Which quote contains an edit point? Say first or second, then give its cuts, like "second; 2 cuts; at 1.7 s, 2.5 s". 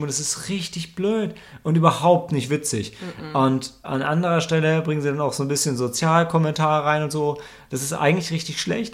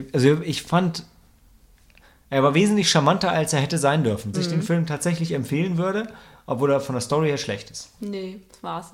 second; 2 cuts; at 4.3 s, 8.0 s